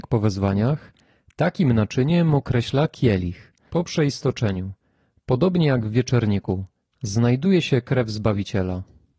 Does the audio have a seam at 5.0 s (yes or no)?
no